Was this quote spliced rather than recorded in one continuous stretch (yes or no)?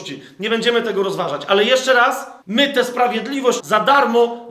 yes